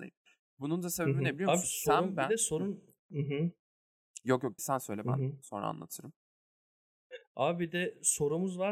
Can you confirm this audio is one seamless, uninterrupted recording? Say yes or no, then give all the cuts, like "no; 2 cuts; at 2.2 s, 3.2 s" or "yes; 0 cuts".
no; 1 cut; at 4.6 s